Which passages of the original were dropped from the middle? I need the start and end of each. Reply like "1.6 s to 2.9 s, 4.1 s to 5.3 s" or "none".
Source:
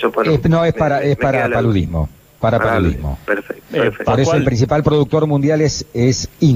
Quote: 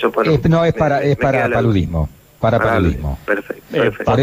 none